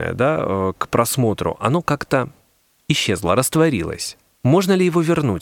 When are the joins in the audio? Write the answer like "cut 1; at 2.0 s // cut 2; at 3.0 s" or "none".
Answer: none